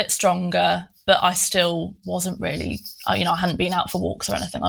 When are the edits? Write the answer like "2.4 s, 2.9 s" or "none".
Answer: none